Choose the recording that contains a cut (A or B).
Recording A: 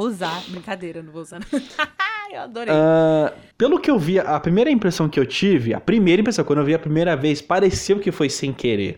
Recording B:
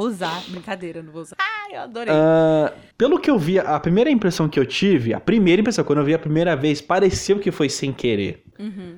B